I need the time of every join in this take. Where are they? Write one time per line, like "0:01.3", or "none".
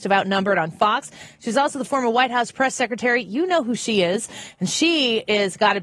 none